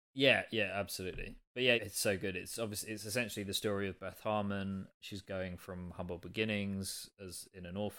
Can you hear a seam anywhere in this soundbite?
yes; 1 cut; at 1.8 s

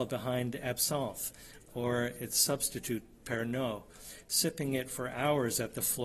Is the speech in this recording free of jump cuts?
yes; 0 cuts

